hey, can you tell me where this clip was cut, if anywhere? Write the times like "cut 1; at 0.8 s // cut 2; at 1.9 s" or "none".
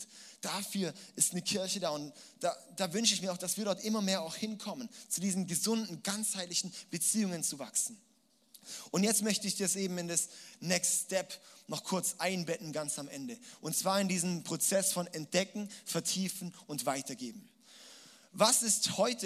none